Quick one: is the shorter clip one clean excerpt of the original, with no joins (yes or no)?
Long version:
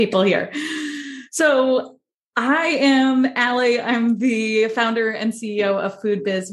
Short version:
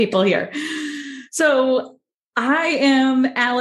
yes